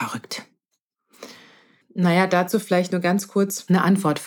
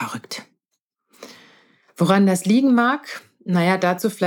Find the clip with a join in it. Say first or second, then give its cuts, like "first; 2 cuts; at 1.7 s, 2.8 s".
first; 1 cut; at 1.8 s